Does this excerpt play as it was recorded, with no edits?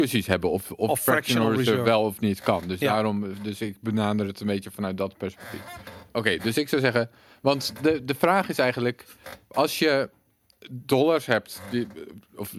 yes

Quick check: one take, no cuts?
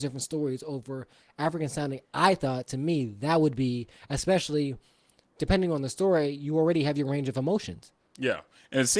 yes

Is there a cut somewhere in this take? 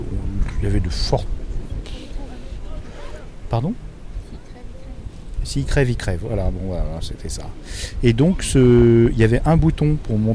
no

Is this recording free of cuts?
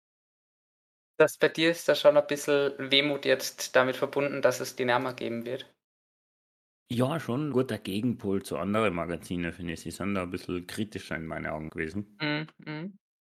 no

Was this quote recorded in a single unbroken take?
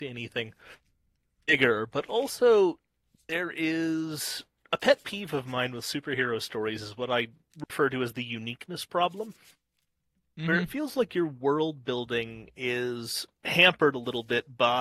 yes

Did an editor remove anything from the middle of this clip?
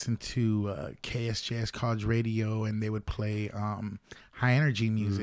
no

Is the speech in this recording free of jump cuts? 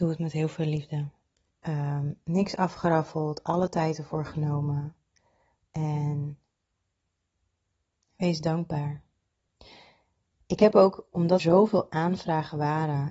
no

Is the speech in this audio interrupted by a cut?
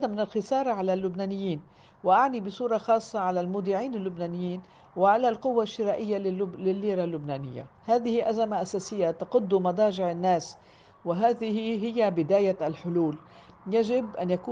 yes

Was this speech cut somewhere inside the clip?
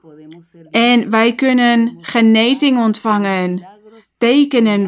no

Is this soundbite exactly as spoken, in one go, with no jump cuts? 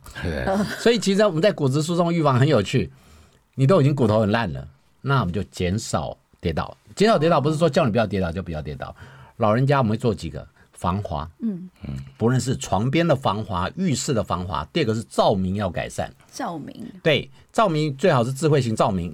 no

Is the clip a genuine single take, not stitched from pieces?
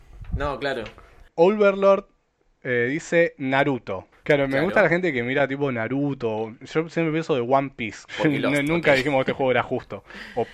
no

